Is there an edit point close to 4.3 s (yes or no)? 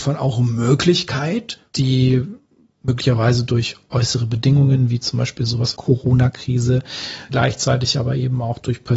no